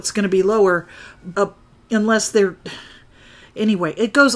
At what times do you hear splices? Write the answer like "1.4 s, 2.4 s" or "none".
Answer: 1.3 s